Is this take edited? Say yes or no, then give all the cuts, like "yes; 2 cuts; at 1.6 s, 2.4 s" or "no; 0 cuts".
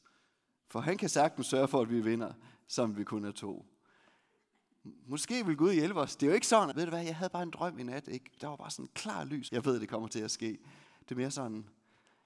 yes; 2 cuts; at 6.7 s, 9.5 s